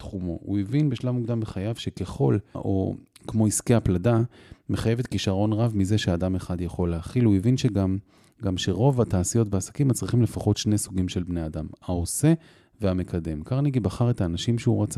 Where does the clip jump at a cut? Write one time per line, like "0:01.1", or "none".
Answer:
0:02.5